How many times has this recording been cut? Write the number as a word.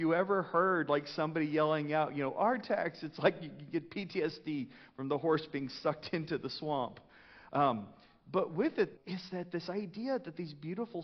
two